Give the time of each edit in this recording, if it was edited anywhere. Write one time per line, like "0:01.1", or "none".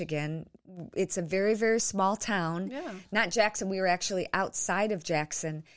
none